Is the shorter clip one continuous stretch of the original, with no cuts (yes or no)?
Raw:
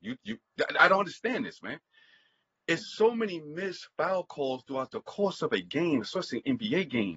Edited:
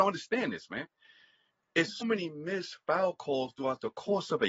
no